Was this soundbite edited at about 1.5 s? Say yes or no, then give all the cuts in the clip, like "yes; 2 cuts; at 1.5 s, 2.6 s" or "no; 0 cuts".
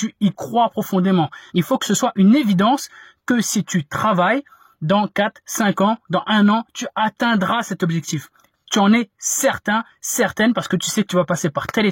yes; 1 cut; at 1.5 s